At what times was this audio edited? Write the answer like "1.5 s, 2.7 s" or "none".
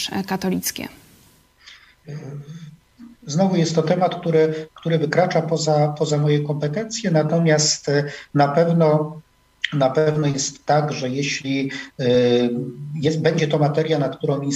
none